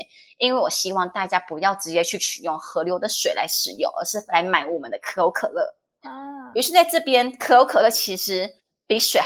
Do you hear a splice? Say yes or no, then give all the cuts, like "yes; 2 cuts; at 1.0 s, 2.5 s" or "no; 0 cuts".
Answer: no; 0 cuts